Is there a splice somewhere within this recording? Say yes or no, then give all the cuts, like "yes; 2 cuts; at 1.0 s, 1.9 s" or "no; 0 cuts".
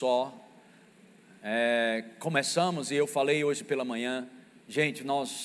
no; 0 cuts